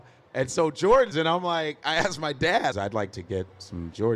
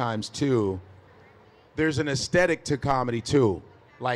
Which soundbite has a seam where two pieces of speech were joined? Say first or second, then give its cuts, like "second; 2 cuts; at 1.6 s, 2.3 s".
first; 2 cuts; at 1.1 s, 2.7 s